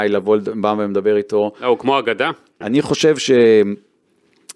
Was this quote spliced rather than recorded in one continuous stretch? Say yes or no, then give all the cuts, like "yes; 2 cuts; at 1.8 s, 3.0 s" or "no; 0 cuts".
yes; 1 cut; at 2.6 s